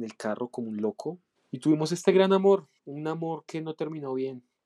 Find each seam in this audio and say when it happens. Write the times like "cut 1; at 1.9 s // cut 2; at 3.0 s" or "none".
cut 1; at 1.4 s // cut 2; at 2.8 s